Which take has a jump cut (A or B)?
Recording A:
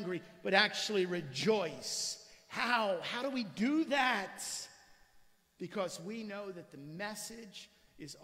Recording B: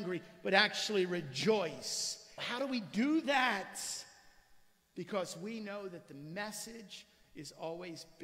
B